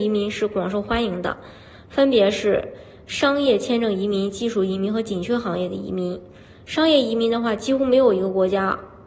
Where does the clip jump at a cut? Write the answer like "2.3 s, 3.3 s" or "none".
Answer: none